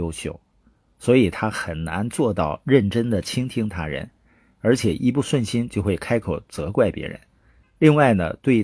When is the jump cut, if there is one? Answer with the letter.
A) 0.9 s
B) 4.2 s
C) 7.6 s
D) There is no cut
C